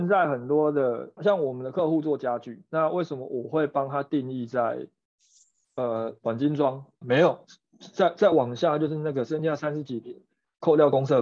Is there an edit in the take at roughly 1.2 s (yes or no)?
yes